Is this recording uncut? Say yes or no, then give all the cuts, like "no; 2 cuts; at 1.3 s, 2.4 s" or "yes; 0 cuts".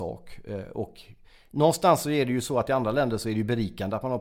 yes; 0 cuts